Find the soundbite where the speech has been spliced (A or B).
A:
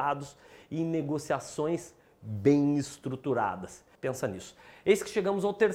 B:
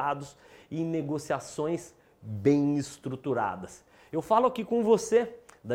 A